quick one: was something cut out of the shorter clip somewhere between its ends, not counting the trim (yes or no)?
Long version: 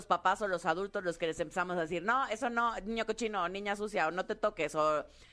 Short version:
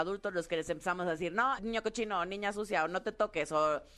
yes